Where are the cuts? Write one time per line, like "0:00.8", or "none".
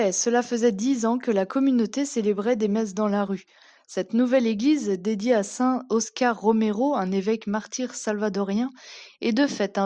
none